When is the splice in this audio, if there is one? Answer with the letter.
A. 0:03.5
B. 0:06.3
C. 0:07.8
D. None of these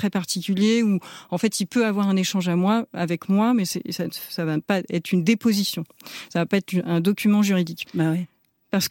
C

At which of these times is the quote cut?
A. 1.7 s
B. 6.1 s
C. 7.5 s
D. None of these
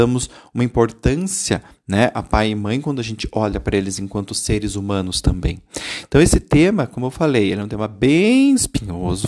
D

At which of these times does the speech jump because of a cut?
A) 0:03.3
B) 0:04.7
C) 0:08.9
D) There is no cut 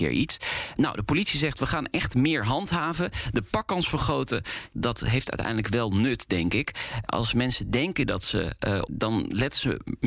C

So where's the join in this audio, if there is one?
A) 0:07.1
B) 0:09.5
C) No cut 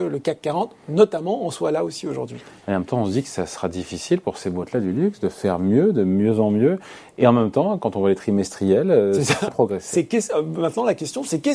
B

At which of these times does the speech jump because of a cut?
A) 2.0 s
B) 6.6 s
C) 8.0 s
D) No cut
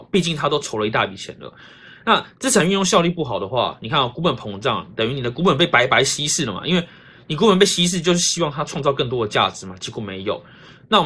D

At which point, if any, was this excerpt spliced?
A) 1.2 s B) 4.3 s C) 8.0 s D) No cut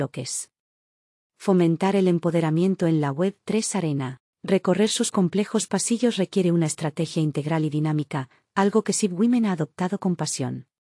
B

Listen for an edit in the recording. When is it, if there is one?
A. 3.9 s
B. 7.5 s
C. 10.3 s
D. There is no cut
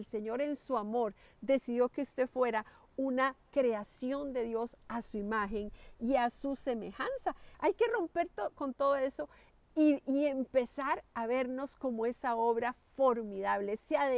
B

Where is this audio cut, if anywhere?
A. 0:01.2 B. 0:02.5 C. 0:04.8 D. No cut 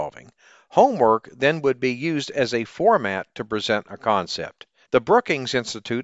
C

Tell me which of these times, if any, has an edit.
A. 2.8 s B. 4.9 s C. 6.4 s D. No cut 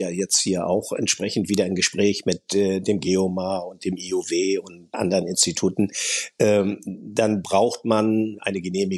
B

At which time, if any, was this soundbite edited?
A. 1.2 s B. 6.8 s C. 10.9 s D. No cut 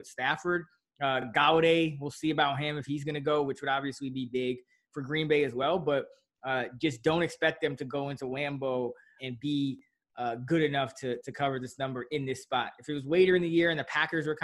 D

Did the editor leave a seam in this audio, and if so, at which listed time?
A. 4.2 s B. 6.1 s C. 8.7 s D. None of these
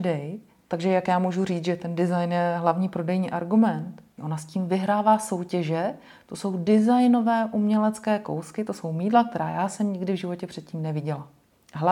A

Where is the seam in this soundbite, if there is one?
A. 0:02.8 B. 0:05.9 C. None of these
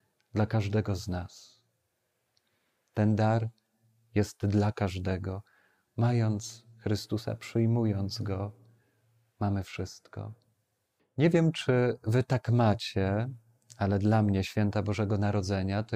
B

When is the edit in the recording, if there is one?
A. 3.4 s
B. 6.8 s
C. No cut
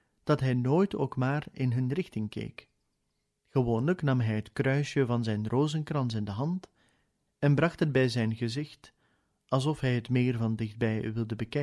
A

